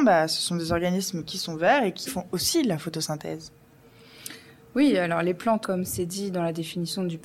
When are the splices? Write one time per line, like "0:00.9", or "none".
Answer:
0:02.1
0:05.6